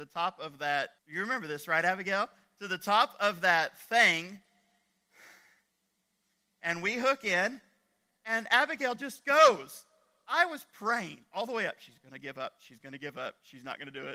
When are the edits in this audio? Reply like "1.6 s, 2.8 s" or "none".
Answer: 1.0 s